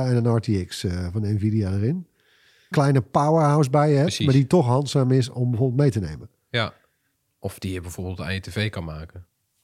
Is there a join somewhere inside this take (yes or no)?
yes